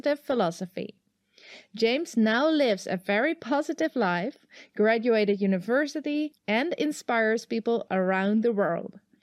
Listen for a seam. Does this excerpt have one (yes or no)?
yes